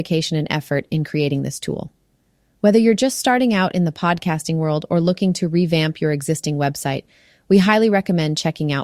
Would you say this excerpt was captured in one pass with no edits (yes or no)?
yes